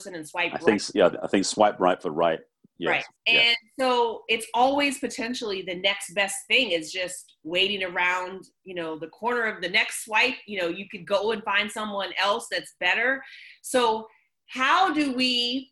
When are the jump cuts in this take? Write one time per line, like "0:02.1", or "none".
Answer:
0:03.2